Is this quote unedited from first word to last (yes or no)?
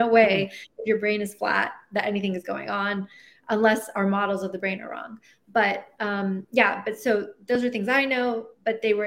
yes